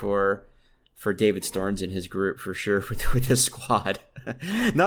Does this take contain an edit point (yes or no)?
no